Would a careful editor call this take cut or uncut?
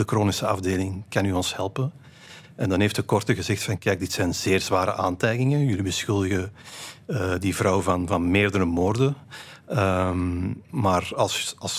uncut